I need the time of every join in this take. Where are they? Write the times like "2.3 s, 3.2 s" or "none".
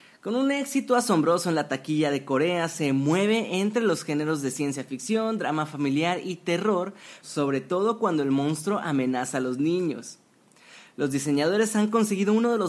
7.2 s